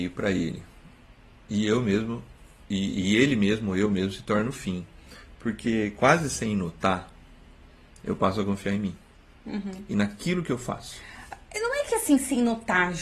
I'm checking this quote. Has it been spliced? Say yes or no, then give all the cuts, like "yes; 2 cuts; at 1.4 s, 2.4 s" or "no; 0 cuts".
no; 0 cuts